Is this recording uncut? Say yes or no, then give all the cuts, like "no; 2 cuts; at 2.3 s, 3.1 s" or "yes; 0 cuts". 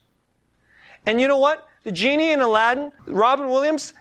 no; 1 cut; at 3.0 s